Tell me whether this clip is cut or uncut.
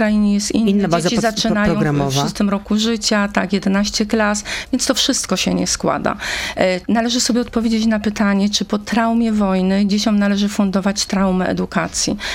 uncut